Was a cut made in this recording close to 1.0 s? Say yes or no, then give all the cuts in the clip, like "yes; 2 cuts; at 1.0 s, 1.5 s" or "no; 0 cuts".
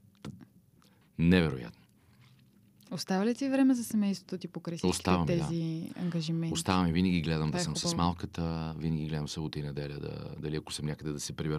yes; 1 cut; at 1.0 s